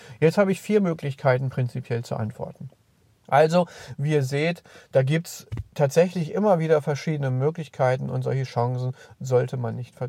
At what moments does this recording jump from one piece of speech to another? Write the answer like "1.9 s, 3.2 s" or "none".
3.2 s